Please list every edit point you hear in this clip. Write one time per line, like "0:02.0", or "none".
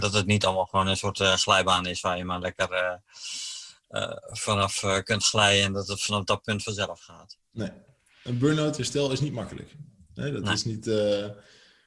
none